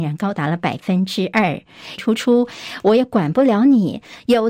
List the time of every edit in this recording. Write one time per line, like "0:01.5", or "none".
0:02.0